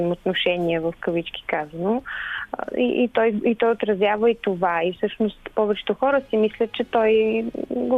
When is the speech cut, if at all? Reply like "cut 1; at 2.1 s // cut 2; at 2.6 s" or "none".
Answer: none